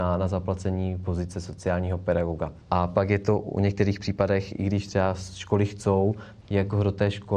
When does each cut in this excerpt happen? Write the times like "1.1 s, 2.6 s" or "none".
6.4 s